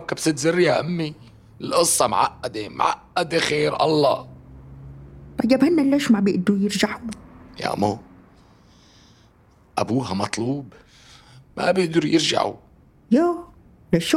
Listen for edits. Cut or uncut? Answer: uncut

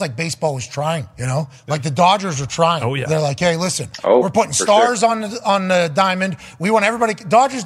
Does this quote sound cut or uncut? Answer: uncut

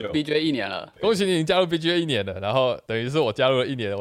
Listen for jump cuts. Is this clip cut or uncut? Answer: cut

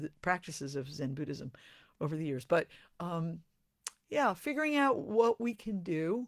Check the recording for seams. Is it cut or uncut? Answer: uncut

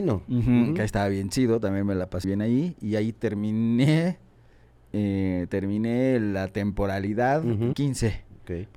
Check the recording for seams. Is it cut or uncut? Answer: cut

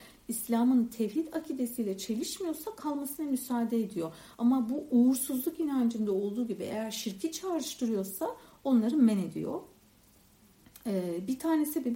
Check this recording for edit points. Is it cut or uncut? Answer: uncut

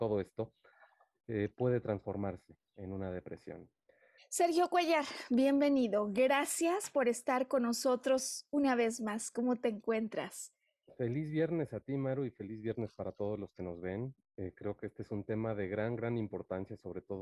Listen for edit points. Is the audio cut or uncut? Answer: cut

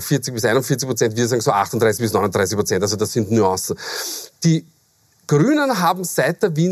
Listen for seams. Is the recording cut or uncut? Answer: uncut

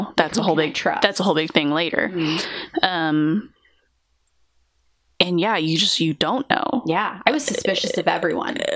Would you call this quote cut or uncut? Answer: uncut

